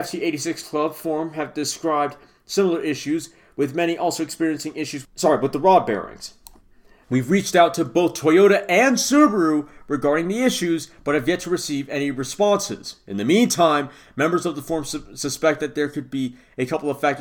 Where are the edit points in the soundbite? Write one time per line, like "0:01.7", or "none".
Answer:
0:07.0